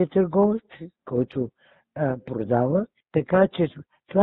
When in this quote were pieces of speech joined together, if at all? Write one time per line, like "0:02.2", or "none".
0:03.0